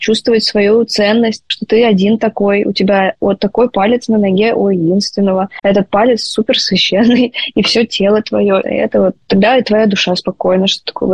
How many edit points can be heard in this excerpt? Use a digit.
1